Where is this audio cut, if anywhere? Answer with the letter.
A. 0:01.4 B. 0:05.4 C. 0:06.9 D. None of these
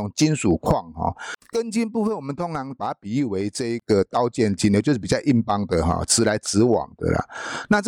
B